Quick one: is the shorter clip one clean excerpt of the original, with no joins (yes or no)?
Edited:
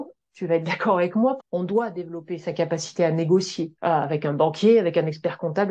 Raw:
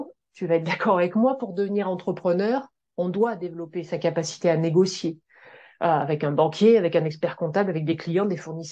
no